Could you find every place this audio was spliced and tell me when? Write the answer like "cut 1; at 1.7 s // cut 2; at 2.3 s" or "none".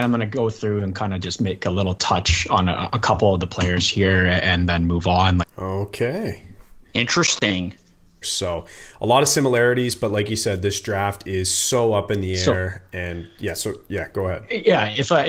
cut 1; at 5.4 s // cut 2; at 8.2 s